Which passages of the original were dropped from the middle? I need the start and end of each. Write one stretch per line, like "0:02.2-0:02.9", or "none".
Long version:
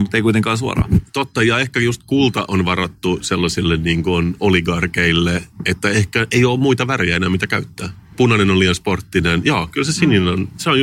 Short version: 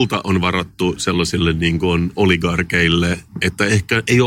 none